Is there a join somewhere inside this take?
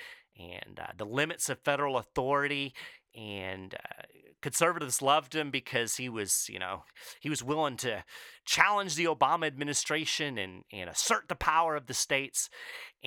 no; 0 cuts

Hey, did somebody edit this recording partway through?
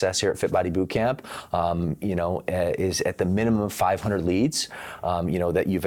no; 0 cuts

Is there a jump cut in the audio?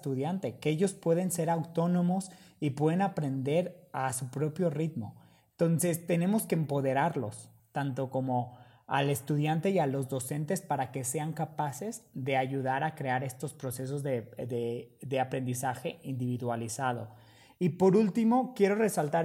yes; 1 cut; at 7.6 s

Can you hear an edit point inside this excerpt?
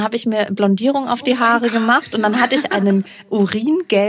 no; 0 cuts

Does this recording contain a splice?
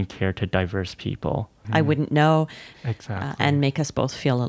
yes; 2 cuts; at 1.6 s, 2.7 s

